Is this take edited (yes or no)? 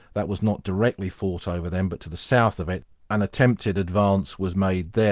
no